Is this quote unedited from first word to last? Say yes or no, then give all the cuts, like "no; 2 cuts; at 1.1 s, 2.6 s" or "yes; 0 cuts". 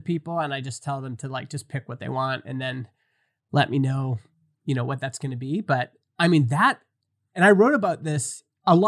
yes; 0 cuts